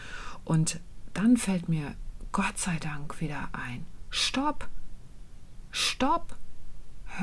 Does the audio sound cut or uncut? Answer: uncut